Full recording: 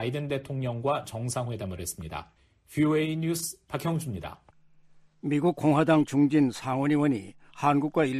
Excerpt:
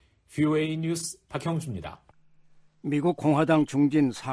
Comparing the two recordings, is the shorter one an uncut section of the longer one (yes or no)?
yes